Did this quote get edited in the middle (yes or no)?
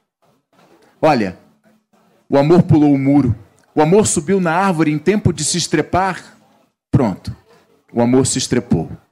yes